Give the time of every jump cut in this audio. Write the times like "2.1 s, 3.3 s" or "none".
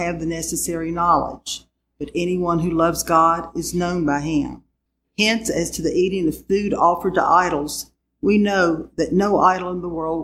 none